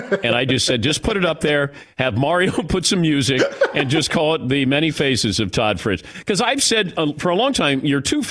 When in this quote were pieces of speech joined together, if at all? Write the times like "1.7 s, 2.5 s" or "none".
none